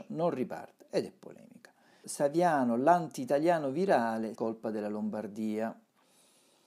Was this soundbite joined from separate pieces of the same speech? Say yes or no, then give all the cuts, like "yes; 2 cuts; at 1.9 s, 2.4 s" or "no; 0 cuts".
yes; 2 cuts; at 2.0 s, 4.3 s